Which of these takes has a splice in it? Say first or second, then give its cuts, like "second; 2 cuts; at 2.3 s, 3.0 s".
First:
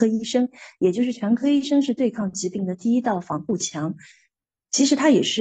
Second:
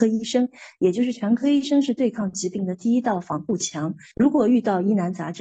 second; 1 cut; at 4.1 s